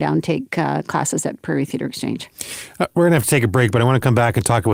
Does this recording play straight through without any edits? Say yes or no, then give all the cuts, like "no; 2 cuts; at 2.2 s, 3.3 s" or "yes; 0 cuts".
yes; 0 cuts